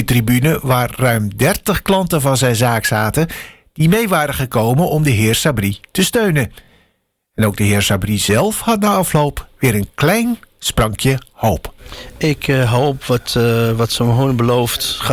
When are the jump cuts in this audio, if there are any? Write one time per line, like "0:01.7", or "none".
none